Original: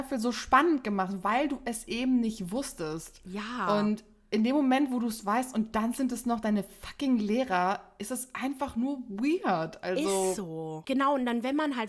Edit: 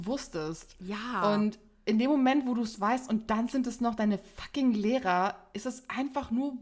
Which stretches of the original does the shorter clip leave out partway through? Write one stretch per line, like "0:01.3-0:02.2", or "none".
none

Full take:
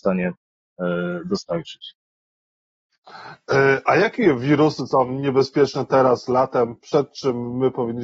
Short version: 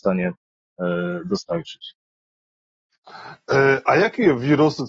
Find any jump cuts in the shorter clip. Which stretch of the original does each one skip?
none

